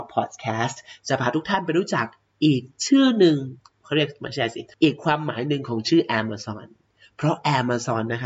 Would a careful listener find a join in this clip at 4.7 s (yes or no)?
yes